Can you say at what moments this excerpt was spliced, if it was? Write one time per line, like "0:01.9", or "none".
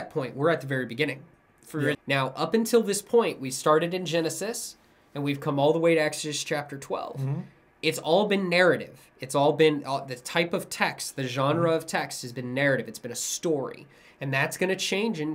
0:01.9